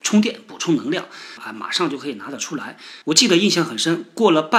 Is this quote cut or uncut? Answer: cut